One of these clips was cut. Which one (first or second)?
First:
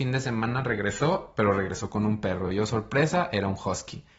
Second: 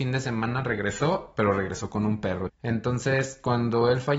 second